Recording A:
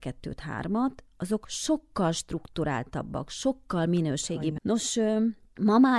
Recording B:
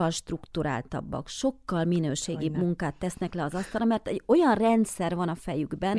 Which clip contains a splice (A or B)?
A